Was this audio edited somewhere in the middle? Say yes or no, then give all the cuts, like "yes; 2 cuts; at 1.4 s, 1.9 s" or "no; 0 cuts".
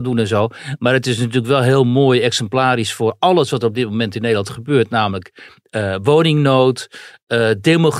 no; 0 cuts